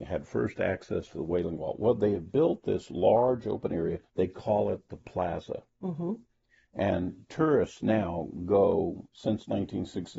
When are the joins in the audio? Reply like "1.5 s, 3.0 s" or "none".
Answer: 4.1 s